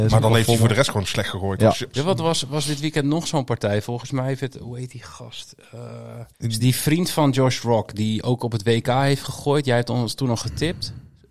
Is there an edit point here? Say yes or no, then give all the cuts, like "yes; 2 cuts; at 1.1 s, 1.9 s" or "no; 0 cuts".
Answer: yes; 2 cuts; at 1.9 s, 6.3 s